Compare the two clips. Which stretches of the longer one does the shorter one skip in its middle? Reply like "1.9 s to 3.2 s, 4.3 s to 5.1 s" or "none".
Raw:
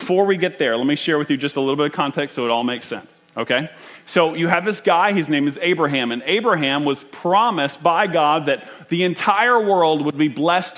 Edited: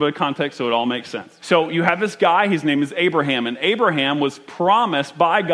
3.2 s to 4.0 s